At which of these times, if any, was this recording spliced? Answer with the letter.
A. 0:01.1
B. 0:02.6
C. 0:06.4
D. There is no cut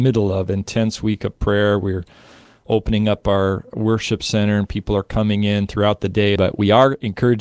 C